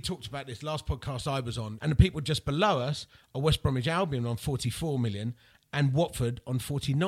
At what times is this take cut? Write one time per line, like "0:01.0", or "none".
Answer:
0:01.8
0:05.5